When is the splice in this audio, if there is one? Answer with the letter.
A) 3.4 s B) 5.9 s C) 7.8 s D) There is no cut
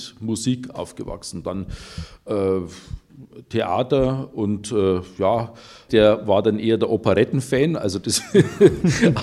B